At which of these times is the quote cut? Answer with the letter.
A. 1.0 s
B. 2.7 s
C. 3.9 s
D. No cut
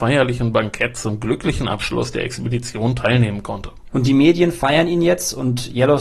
C